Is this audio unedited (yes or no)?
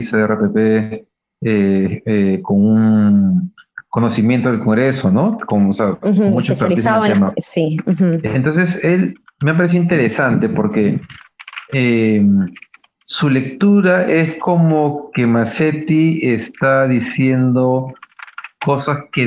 yes